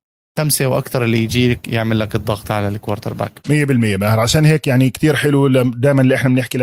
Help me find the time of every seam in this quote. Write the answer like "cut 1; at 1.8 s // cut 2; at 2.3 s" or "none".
cut 1; at 3.4 s